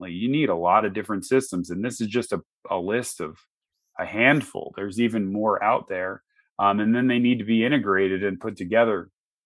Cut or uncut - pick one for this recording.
uncut